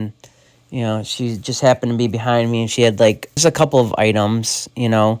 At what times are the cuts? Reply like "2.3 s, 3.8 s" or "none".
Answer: 3.4 s